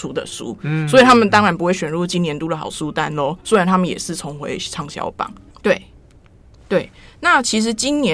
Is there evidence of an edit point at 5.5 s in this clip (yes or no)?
yes